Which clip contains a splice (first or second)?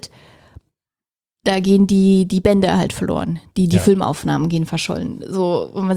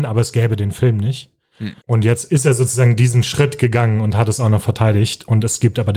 second